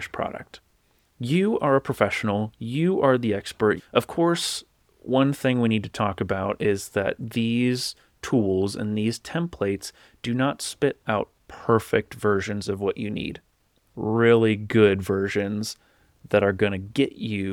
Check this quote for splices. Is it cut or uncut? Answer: cut